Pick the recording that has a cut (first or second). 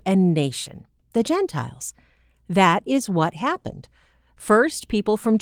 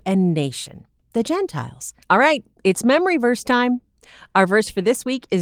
second